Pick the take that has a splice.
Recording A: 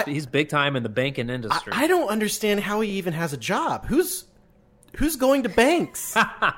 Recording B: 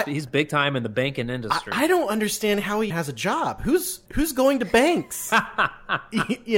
B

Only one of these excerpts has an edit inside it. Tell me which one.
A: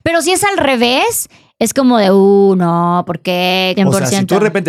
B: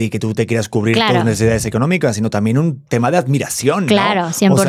A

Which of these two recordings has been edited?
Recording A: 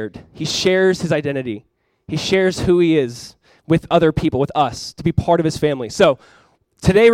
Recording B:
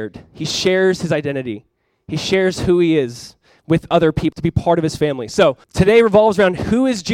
B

